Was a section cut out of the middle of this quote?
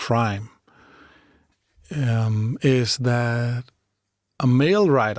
no; 0 cuts

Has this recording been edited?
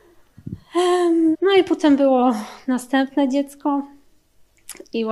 yes; 1 cut; at 1.3 s

